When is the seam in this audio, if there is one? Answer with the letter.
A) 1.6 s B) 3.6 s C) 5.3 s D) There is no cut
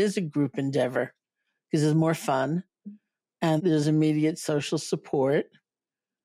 B